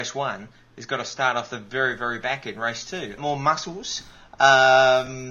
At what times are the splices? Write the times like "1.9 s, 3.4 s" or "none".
3.2 s